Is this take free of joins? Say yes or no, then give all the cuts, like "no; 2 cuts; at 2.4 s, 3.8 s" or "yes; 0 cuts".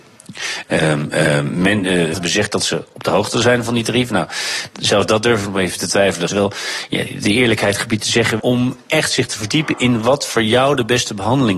no; 3 cuts; at 2.1 s, 6.3 s, 8.4 s